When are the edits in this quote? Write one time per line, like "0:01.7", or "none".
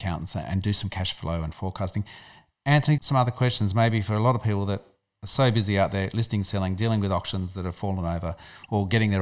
0:03.0

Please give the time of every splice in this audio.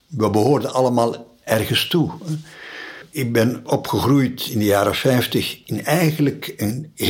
none

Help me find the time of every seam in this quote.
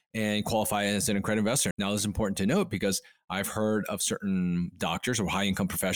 0:01.7

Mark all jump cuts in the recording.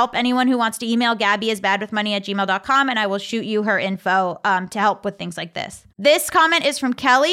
0:05.9

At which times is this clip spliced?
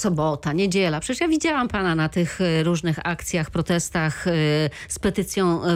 none

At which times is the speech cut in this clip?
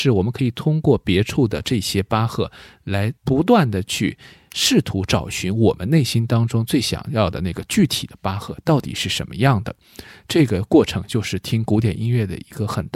0:03.2

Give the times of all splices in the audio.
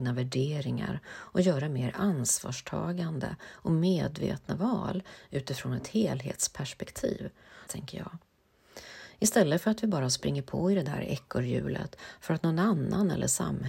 0:07.7

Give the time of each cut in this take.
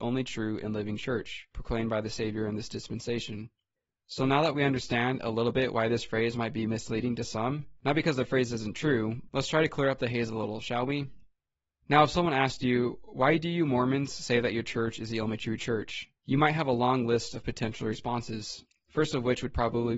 0:09.3

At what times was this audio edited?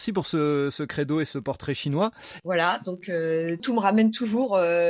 0:02.4
0:03.6

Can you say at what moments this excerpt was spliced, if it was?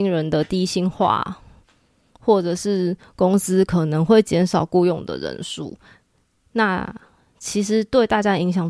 none

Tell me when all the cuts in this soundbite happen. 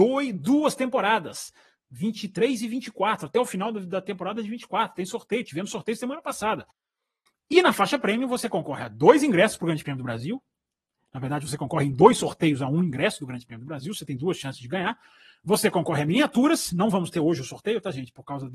none

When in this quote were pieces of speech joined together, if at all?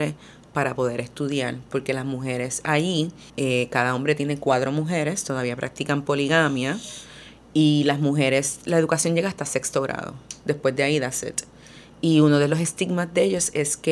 0:03.3

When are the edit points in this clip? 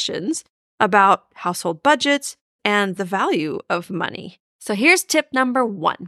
0:02.6
0:04.5

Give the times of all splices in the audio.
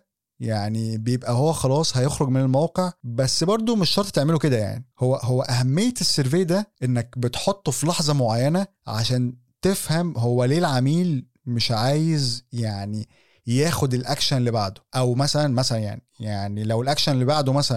0:05.2
0:08.7

